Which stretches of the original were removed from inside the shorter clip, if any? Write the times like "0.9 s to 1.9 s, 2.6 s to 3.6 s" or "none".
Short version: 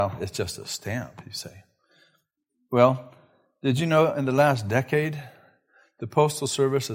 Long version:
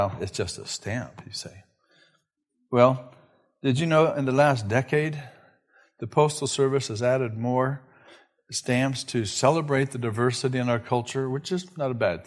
none